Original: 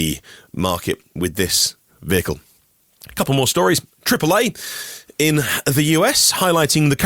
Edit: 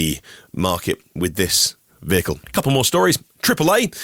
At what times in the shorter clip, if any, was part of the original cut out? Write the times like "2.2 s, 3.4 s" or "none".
2.4 s